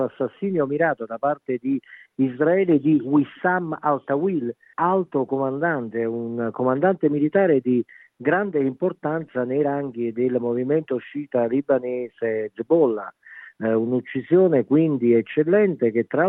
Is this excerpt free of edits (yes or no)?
no